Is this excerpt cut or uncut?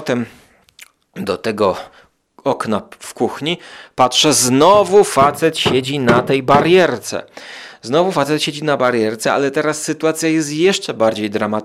uncut